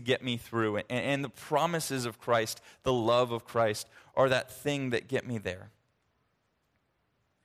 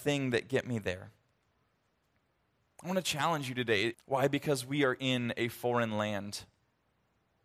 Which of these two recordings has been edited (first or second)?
second